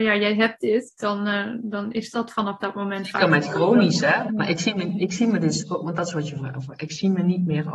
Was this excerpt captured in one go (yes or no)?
no